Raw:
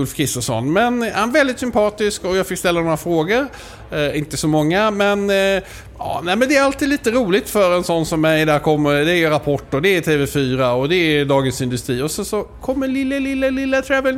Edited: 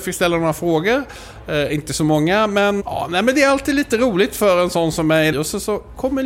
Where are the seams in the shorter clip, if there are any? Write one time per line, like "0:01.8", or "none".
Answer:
0:02.8
0:05.3